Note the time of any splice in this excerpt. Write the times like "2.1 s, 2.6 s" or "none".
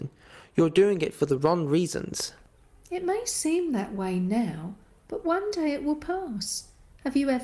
none